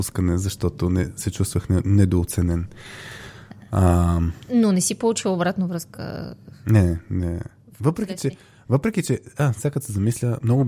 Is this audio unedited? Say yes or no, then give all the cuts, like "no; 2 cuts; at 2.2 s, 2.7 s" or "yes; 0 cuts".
yes; 0 cuts